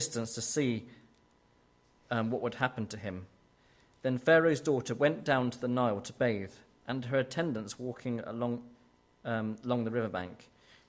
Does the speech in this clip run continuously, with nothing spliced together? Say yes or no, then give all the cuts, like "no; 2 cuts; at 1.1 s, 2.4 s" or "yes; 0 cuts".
yes; 0 cuts